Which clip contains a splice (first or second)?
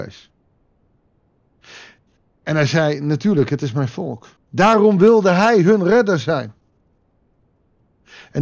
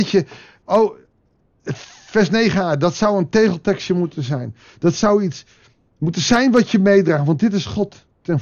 first